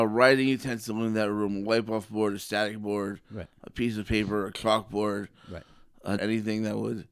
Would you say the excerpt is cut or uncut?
cut